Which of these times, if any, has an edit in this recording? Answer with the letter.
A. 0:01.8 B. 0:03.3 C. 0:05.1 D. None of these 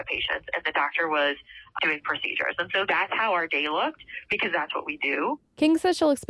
A